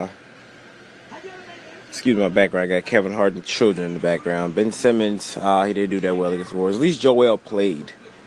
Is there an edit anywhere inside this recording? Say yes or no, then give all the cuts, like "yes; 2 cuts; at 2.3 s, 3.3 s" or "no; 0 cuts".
no; 0 cuts